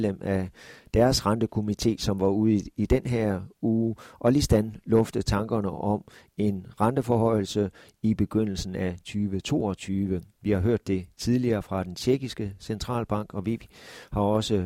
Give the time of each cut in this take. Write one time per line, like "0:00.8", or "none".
0:10.4